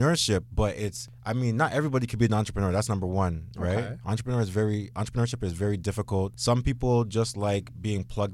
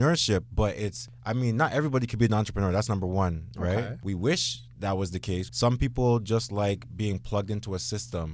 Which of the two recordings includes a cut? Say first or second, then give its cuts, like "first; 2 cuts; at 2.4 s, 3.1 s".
second; 2 cuts; at 4.0 s, 5.5 s